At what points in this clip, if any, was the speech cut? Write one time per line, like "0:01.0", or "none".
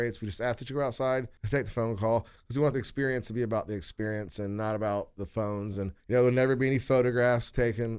none